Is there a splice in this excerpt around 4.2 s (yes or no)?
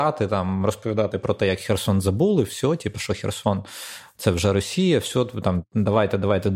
no